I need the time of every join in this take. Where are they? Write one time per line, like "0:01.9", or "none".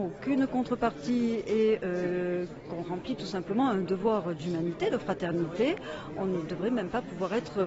none